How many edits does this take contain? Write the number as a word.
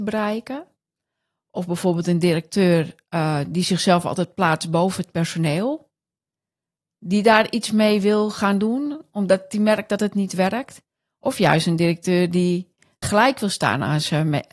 one